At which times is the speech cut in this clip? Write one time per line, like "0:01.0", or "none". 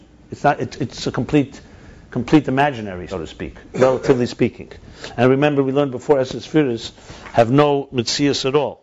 0:03.1